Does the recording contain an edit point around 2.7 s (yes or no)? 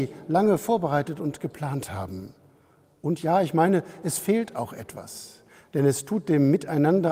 no